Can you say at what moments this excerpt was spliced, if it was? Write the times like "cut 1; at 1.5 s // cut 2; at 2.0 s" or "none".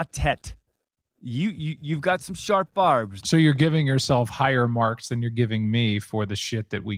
cut 1; at 3.2 s